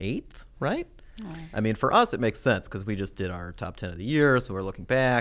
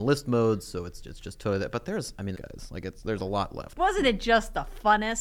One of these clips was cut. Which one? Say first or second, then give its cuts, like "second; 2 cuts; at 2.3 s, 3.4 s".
second; 2 cuts; at 2.3 s, 3.8 s